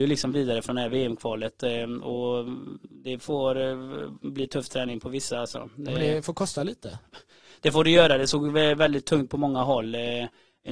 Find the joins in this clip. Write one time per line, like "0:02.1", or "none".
none